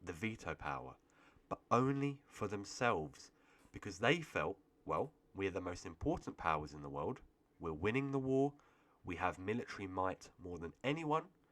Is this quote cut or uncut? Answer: uncut